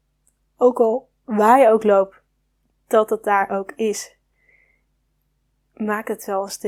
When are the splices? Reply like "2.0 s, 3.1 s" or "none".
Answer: none